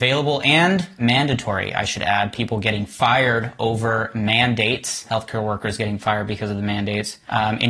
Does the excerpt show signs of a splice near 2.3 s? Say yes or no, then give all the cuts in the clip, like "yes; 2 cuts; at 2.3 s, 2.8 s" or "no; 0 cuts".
no; 0 cuts